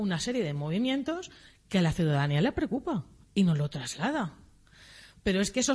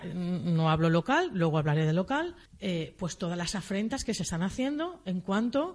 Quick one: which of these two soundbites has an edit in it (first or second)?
second